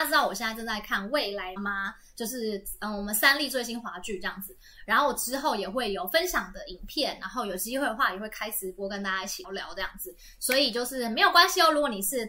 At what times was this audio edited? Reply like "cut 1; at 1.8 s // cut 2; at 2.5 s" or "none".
cut 1; at 1.6 s // cut 2; at 9.4 s